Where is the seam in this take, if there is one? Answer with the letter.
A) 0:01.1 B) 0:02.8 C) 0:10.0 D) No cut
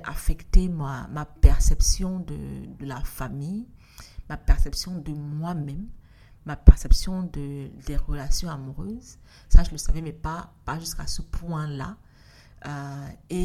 B